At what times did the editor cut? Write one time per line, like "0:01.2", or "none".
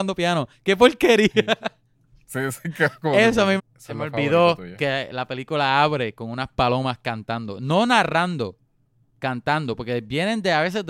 0:03.6